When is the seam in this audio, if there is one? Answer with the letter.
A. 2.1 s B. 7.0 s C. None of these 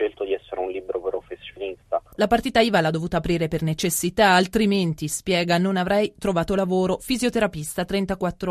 A